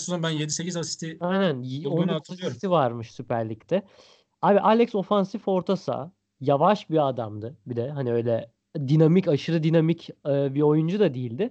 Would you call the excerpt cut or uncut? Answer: uncut